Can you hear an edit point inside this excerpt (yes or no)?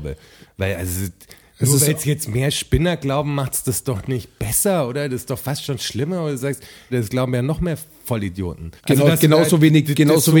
yes